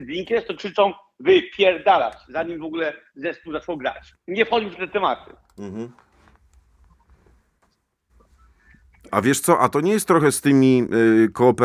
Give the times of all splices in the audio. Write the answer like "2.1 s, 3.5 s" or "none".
4.1 s